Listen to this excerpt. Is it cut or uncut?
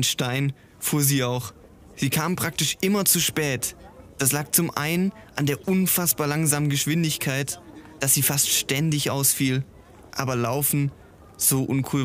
cut